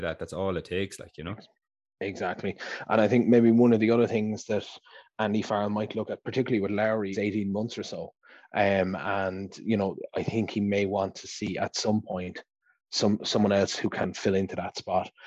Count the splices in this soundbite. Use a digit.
1